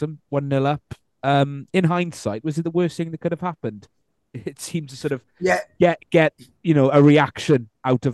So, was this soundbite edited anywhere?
no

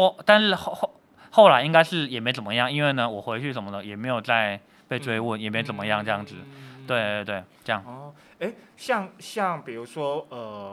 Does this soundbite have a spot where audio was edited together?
no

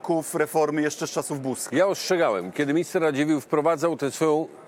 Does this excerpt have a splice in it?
no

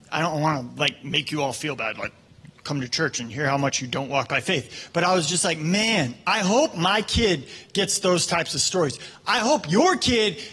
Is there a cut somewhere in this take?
no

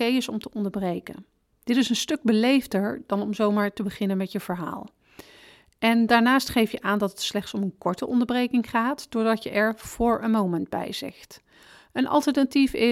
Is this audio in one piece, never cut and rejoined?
yes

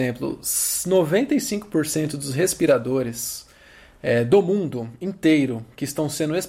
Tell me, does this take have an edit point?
no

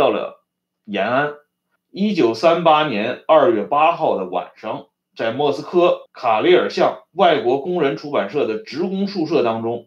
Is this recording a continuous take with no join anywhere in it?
no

